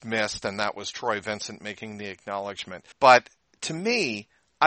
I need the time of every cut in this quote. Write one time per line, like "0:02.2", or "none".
0:02.9